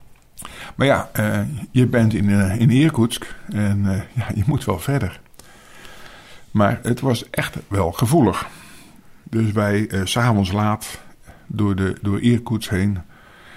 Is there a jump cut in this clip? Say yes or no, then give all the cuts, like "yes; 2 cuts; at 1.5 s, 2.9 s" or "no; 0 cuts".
no; 0 cuts